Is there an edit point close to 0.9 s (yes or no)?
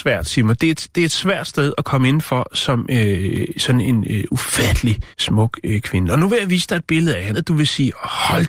no